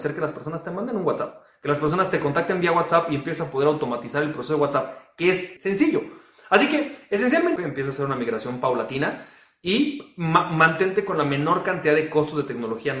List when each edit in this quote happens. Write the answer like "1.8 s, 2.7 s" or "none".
5.6 s, 7.6 s